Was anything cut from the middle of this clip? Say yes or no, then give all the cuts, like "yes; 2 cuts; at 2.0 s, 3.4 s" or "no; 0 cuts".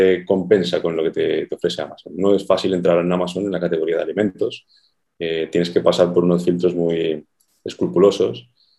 no; 0 cuts